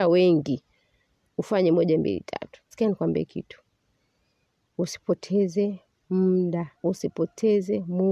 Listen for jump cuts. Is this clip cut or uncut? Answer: cut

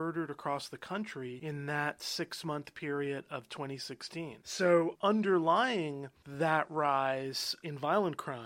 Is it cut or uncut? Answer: uncut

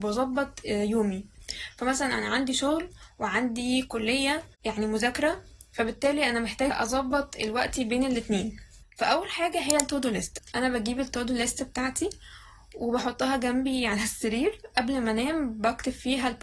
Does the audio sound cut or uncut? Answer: cut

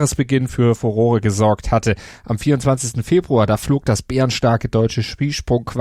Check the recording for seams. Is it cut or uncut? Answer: uncut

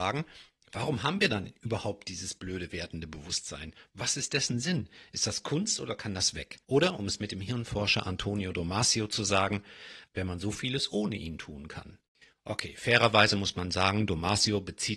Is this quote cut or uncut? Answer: cut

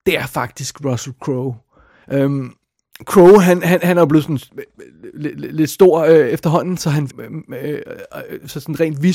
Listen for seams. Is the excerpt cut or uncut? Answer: cut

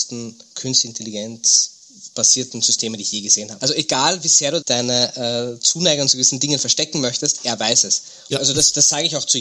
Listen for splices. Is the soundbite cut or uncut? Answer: cut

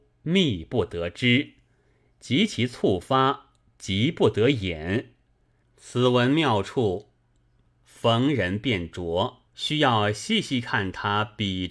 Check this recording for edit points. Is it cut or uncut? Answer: cut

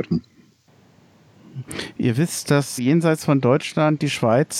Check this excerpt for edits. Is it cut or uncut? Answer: cut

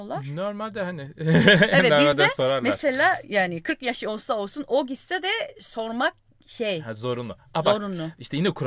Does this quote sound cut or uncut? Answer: uncut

